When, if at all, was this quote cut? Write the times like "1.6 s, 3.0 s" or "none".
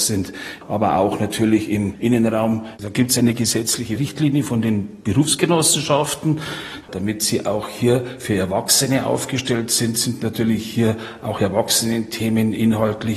2.7 s, 6.8 s